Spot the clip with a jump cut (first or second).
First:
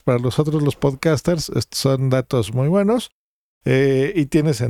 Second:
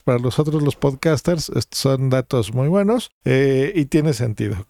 second